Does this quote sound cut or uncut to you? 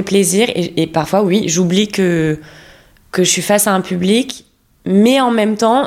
uncut